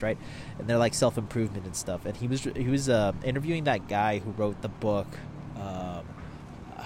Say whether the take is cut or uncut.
uncut